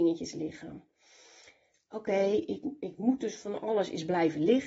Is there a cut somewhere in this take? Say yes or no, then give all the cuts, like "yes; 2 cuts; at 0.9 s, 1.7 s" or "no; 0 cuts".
yes; 1 cut; at 1.7 s